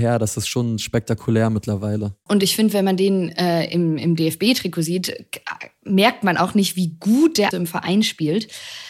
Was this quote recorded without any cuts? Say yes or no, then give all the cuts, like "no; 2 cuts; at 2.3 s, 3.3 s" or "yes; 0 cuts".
no; 2 cuts; at 2.3 s, 7.5 s